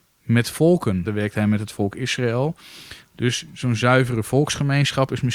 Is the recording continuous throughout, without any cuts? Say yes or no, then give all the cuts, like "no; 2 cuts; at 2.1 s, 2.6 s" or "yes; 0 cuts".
no; 2 cuts; at 1.0 s, 3.0 s